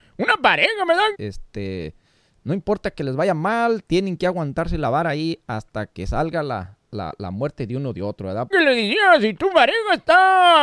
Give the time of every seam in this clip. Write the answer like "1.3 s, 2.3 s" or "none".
1.1 s, 8.5 s

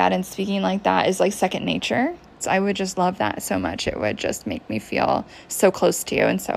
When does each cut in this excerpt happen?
2.4 s

